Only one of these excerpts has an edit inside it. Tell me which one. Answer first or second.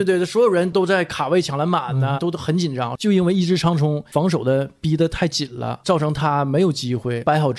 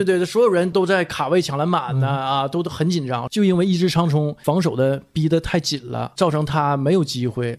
first